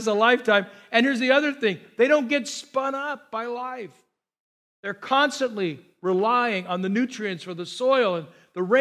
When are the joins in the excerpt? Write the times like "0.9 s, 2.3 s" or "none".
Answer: none